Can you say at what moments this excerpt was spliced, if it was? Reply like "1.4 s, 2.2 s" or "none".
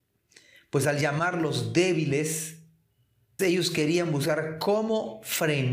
3.4 s